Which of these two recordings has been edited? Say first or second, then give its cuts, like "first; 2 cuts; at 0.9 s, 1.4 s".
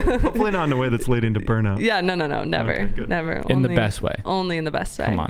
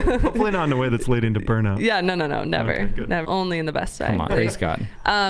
second; 2 cuts; at 3.2 s, 4.3 s